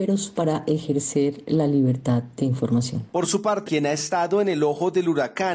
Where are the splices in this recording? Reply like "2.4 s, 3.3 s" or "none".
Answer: 3.6 s